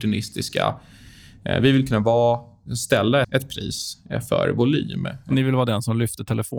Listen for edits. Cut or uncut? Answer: cut